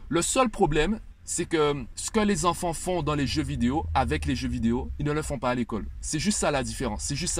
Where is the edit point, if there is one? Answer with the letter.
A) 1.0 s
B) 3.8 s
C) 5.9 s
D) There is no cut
D